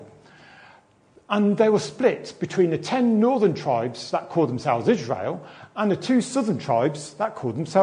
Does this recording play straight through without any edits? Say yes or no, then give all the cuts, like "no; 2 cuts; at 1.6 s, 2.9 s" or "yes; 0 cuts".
yes; 0 cuts